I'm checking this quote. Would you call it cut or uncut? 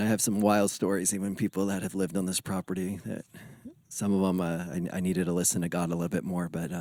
uncut